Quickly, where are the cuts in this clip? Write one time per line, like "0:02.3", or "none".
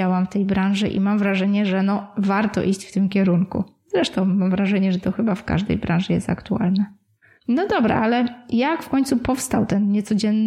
none